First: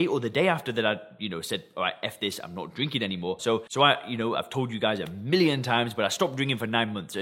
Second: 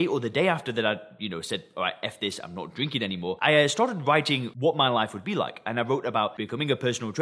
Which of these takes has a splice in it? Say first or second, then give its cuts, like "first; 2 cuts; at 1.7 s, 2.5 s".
first; 1 cut; at 3.4 s